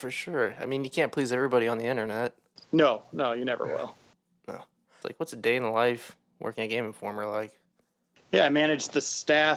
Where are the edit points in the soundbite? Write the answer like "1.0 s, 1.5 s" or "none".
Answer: 5.0 s